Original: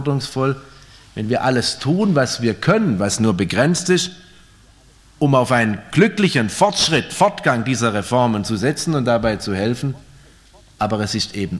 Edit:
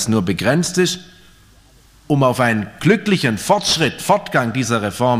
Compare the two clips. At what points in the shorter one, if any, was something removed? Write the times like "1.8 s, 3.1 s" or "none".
none